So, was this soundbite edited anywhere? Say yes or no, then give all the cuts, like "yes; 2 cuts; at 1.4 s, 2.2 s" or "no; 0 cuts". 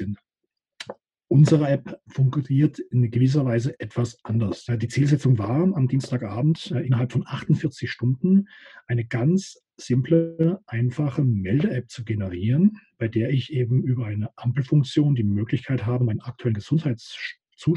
yes; 1 cut; at 4.7 s